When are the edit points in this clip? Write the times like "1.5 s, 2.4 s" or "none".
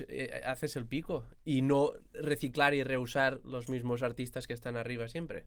1.3 s